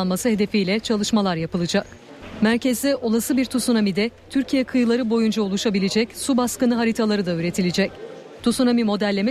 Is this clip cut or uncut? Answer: uncut